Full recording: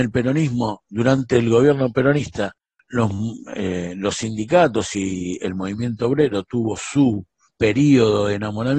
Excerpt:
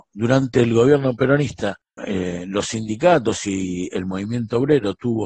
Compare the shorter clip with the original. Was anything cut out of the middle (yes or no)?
yes